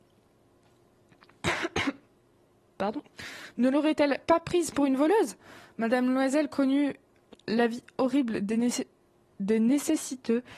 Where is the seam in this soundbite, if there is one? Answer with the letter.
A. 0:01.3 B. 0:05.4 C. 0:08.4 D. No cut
D